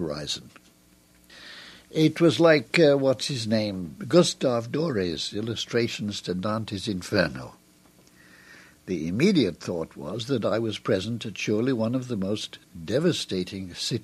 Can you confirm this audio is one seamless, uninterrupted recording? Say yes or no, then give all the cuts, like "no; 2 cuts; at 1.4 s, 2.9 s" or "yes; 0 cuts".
yes; 0 cuts